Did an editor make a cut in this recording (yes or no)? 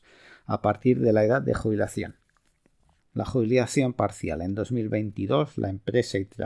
yes